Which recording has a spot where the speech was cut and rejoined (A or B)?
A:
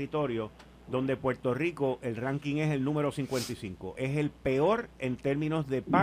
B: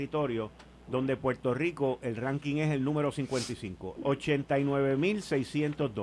B